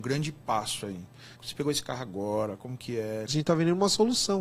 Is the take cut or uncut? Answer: cut